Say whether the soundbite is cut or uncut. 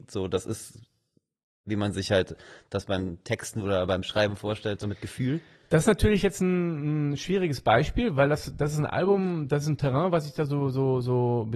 uncut